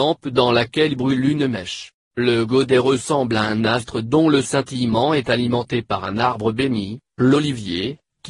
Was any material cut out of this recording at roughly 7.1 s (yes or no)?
no